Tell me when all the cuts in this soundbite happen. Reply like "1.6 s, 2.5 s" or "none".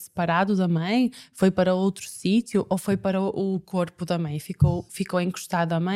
none